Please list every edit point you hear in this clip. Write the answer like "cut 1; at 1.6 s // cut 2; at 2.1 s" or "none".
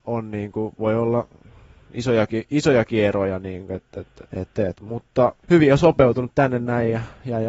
cut 1; at 4.3 s // cut 2; at 5.4 s

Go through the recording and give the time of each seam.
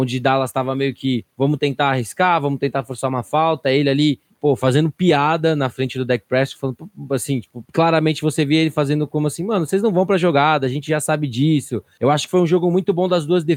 none

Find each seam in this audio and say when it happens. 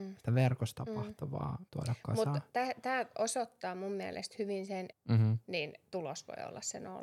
cut 1; at 1.7 s // cut 2; at 4.9 s

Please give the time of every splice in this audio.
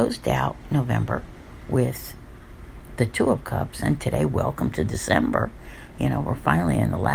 none

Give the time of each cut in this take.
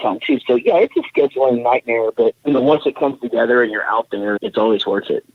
cut 1; at 2.4 s // cut 2; at 4.4 s

